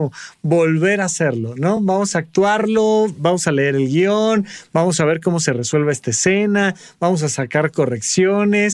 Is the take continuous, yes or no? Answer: yes